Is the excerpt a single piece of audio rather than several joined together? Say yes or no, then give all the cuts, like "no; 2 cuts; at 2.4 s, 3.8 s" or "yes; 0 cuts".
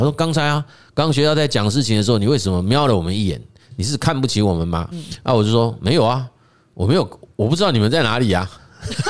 no; 1 cut; at 4.9 s